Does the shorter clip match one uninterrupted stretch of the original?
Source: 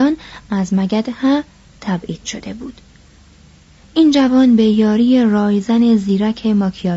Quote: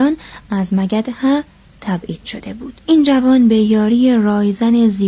no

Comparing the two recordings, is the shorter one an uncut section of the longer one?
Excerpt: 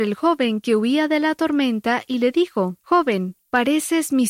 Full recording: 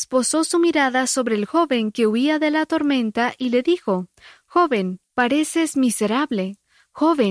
no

